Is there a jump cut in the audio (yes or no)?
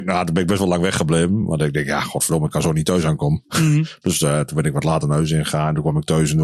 no